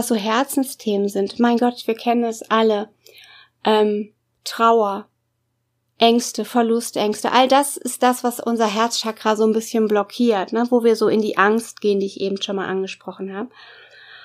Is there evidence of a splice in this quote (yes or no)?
no